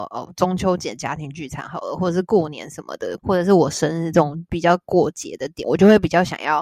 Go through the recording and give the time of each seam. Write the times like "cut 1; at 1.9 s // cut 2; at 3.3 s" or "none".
cut 1; at 3.2 s // cut 2; at 5.6 s